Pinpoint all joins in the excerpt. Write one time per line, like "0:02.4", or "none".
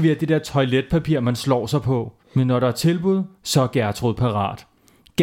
0:02.2